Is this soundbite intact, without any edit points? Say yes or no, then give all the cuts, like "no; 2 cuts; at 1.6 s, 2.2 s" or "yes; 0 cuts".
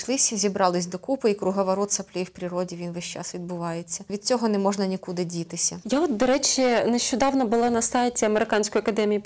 no; 1 cut; at 4.1 s